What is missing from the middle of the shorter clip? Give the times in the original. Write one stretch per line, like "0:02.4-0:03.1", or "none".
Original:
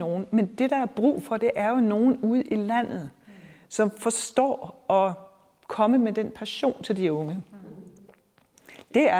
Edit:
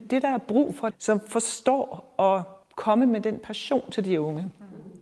0:01.4-0:03.6
0:05.3-0:05.5